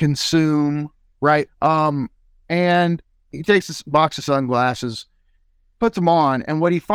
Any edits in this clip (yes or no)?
yes